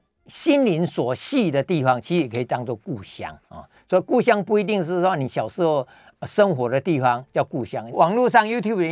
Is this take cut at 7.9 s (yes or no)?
yes